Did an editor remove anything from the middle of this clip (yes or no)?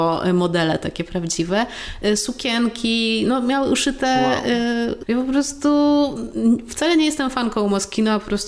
yes